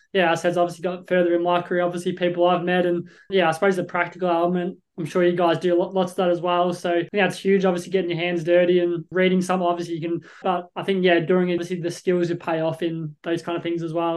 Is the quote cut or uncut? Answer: cut